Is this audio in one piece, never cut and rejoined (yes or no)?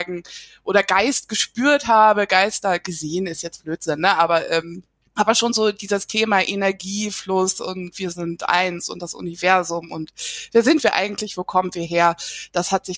yes